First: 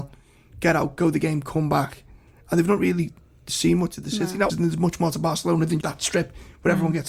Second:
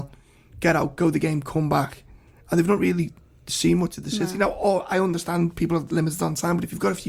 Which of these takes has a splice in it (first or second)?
first